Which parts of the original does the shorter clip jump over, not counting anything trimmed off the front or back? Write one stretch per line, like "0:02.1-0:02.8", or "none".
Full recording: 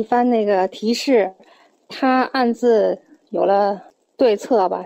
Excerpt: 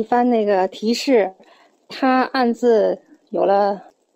none